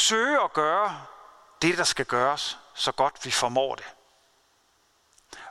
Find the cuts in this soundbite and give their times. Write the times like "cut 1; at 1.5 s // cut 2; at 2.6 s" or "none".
none